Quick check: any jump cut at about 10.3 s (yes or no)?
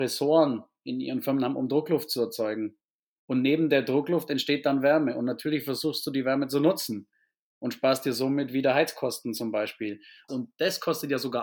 yes